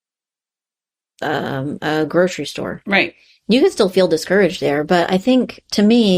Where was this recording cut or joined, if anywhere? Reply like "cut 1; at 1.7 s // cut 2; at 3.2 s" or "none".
none